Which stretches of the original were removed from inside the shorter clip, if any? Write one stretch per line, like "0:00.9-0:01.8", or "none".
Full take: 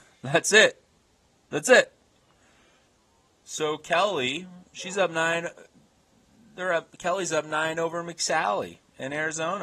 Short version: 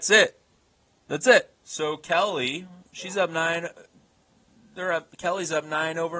0:02.0-0:03.3